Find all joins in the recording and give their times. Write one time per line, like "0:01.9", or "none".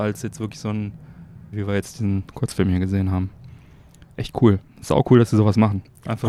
0:01.5